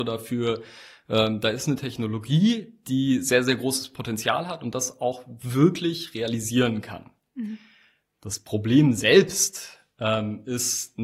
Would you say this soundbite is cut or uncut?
uncut